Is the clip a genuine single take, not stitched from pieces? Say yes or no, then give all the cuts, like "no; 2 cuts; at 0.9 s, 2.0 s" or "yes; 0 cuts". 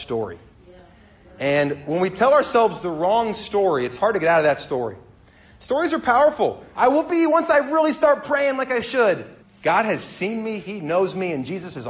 no; 2 cuts; at 6.7 s, 9.4 s